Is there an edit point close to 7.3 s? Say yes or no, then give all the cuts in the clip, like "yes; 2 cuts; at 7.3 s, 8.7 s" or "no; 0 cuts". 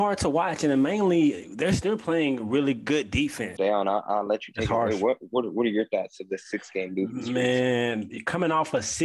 no; 1 cut; at 3.6 s